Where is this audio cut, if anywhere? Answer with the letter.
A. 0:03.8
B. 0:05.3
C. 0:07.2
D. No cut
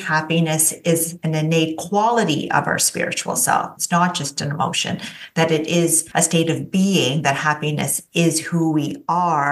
A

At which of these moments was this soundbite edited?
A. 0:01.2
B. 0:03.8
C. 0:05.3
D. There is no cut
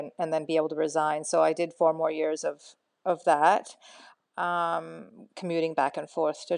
C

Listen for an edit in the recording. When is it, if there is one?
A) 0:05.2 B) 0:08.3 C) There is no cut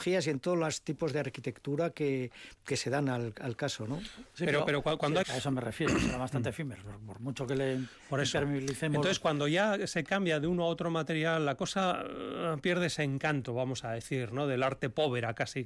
A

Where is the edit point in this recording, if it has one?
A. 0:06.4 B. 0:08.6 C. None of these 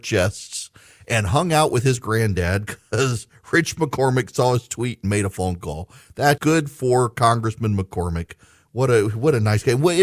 A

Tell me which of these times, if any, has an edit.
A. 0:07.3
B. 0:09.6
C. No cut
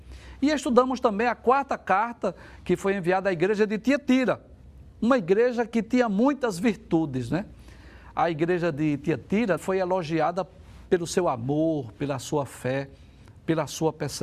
B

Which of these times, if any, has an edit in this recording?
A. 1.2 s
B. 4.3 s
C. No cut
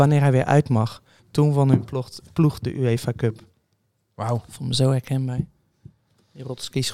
A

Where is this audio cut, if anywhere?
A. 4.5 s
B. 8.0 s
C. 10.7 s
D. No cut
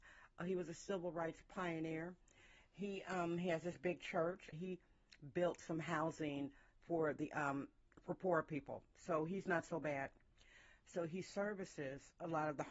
A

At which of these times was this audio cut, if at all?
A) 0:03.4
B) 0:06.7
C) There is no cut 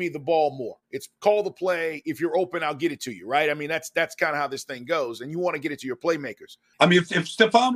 B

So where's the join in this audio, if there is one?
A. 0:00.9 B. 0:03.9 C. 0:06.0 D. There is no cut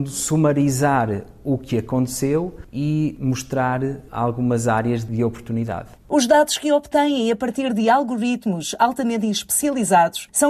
C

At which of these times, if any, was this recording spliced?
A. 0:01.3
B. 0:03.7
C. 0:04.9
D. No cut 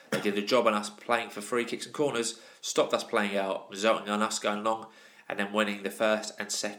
D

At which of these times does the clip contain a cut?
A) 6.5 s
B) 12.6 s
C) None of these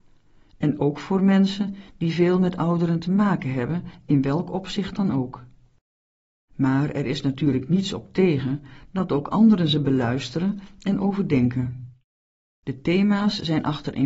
B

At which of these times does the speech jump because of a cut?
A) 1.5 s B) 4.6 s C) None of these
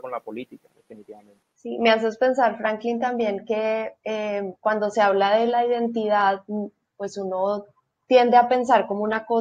A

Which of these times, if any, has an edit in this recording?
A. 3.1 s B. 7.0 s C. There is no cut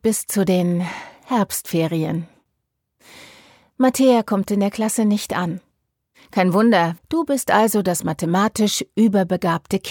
B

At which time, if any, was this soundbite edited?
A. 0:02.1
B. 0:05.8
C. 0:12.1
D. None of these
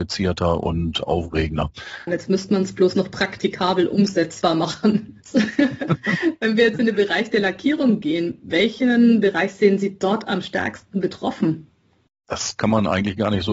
A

